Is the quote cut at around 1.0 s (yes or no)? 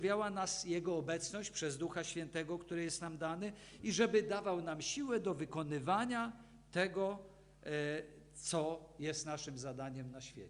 no